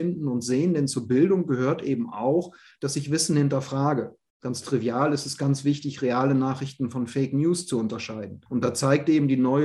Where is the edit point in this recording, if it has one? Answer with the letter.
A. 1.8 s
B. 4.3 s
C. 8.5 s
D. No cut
C